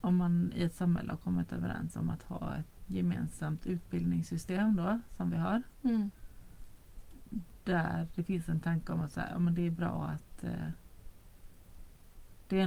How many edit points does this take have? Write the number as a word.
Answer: one